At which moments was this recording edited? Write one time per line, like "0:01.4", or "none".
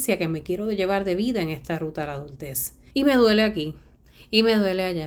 0:02.9